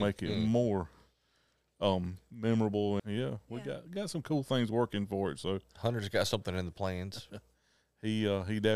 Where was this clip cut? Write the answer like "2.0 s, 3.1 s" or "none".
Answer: 3.0 s